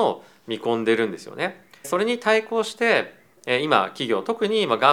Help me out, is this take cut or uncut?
cut